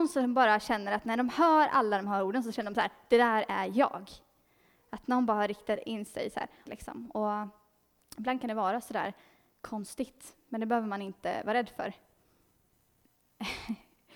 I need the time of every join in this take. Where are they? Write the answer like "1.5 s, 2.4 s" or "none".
6.7 s

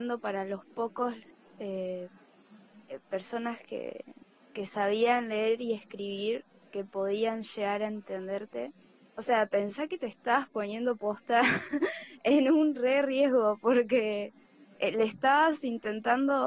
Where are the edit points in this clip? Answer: none

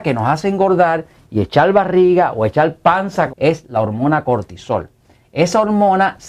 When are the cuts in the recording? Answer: 3.3 s

